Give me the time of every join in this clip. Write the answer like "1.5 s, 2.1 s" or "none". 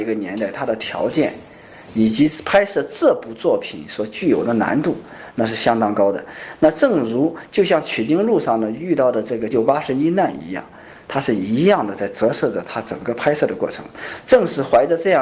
9.5 s